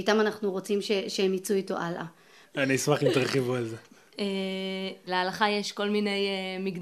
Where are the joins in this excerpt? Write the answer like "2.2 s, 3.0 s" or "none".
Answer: 2.4 s, 5.1 s